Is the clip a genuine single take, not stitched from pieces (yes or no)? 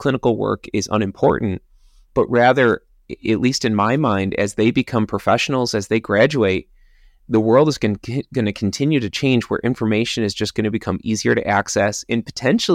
yes